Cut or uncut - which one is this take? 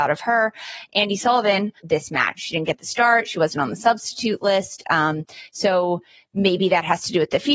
cut